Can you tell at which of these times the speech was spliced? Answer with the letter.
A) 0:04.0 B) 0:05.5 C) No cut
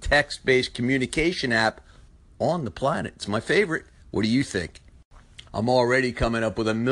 B